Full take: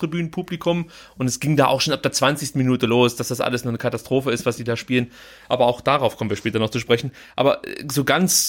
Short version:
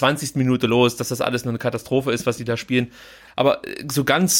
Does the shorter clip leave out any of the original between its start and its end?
yes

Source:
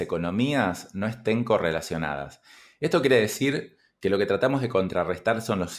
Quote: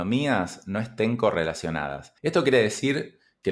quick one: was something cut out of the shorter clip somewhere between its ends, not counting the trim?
yes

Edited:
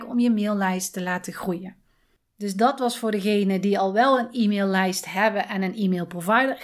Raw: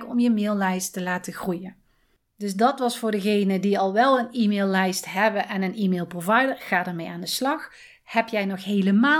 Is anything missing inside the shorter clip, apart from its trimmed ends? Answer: no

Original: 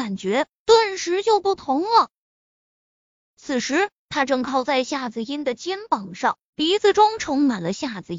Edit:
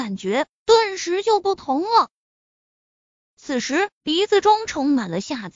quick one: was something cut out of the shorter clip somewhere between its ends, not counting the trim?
yes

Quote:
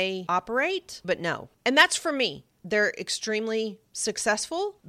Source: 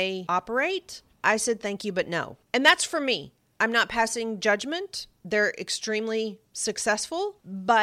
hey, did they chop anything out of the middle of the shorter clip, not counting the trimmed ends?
yes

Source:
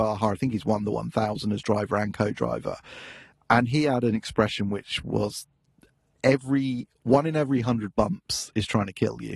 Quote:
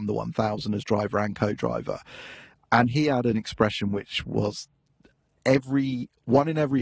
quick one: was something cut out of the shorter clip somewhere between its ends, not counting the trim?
no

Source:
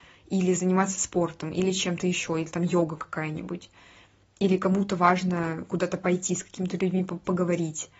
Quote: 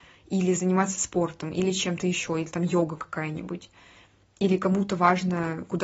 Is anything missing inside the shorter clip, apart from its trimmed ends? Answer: no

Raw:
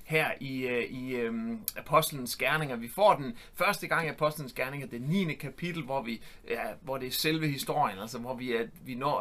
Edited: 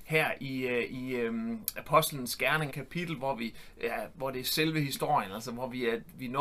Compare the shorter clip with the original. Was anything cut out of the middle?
yes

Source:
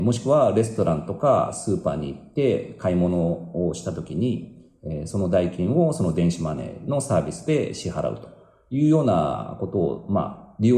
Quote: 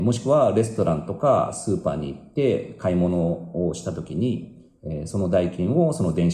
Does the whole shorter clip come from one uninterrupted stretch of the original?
yes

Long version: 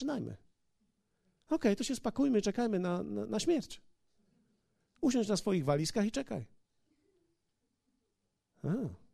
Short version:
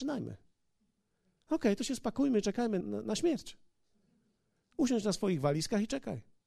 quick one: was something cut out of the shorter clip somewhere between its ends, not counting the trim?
yes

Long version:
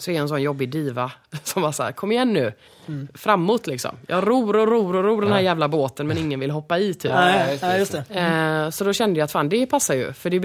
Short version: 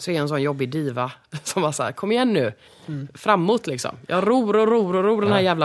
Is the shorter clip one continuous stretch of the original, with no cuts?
yes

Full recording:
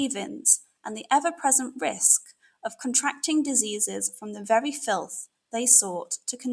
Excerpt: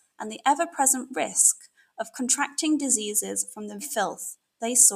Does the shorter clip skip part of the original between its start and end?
yes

